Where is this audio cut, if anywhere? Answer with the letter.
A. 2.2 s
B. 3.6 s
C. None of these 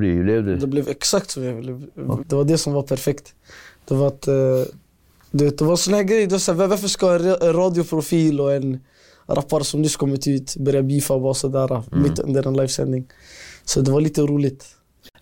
A